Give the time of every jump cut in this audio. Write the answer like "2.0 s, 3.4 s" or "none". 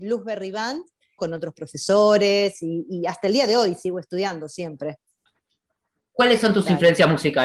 1.2 s